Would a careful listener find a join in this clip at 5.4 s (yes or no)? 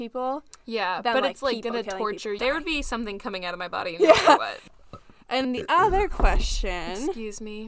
yes